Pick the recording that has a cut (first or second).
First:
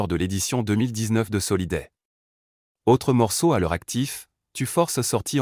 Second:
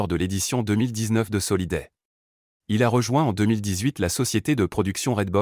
second